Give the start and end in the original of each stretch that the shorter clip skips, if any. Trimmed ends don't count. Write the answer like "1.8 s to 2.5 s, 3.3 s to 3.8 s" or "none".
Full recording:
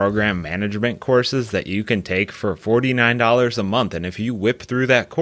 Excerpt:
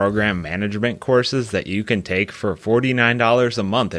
none